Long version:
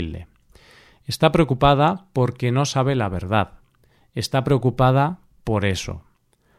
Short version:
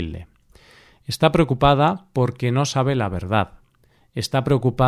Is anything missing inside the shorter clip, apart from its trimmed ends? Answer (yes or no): no